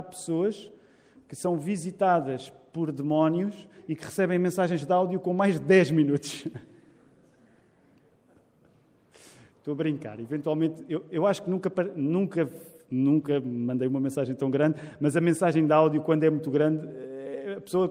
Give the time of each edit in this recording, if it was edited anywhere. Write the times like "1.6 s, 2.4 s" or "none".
none